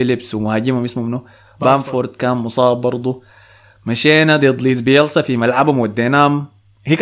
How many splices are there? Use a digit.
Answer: 0